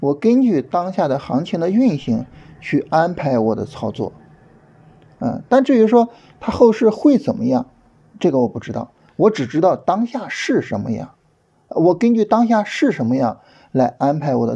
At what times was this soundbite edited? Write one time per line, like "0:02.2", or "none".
none